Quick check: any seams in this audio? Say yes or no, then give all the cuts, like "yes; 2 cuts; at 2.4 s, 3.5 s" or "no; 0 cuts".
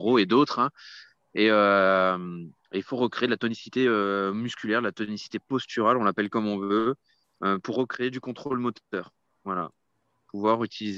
no; 0 cuts